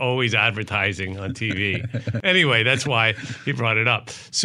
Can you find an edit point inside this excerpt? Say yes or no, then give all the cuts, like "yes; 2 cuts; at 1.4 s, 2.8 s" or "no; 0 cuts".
no; 0 cuts